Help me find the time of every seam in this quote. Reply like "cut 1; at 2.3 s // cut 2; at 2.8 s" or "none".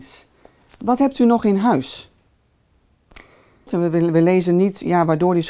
cut 1; at 3.7 s

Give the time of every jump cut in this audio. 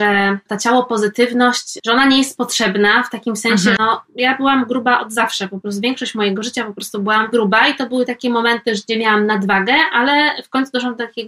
cut 1; at 3.8 s

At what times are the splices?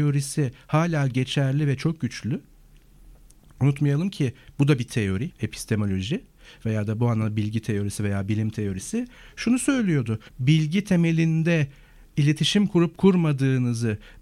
cut 1; at 5.3 s // cut 2; at 10.3 s

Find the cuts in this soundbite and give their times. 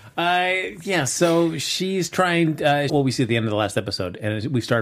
cut 1; at 2.9 s

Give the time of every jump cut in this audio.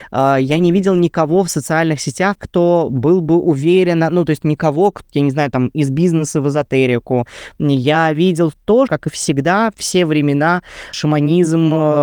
cut 1; at 5.0 s // cut 2; at 8.9 s // cut 3; at 10.9 s

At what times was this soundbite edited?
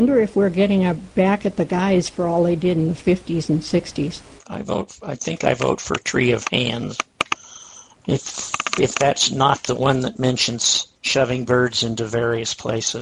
cut 1; at 4.4 s // cut 2; at 10.9 s

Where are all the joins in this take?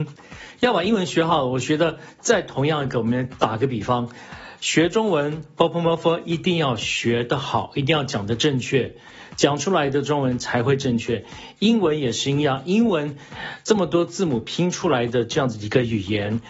none

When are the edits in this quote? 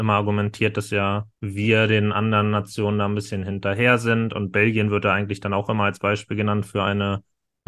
cut 1; at 1.3 s

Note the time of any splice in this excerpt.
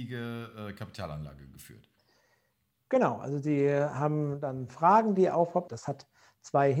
cut 1; at 5.7 s

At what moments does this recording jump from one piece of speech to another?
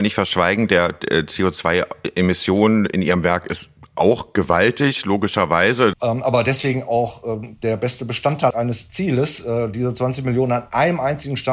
cut 1; at 5.9 s // cut 2; at 8.5 s

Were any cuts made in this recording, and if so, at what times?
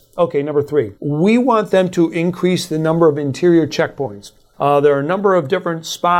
cut 1; at 1.0 s // cut 2; at 4.5 s

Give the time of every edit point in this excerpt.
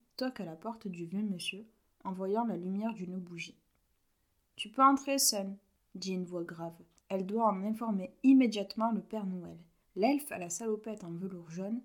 cut 1; at 7.0 s // cut 2; at 9.8 s

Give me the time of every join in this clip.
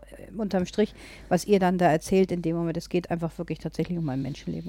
none

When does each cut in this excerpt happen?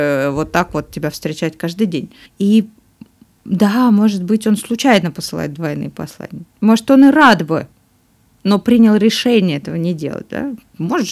cut 1; at 2.3 s

